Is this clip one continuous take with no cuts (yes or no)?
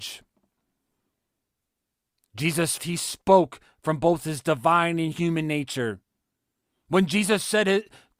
no